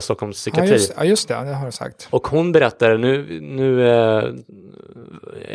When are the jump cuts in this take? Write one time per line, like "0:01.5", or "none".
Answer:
none